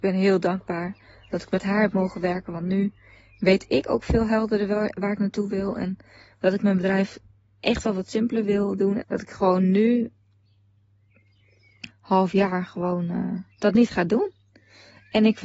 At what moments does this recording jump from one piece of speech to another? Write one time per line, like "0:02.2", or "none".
0:09.0
0:11.9
0:13.5